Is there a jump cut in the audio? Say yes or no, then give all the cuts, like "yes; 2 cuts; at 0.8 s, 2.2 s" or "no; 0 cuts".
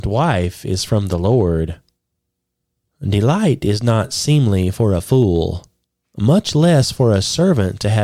yes; 1 cut; at 2.9 s